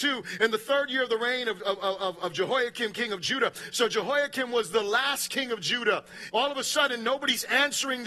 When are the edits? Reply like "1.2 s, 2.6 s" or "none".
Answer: 6.3 s